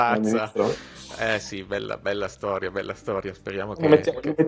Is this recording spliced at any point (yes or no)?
no